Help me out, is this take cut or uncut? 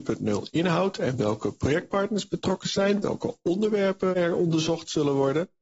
uncut